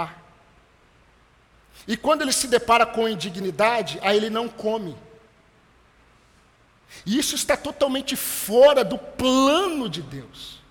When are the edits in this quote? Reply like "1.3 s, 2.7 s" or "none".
none